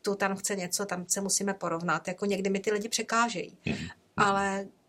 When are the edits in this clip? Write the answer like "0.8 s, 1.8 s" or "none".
none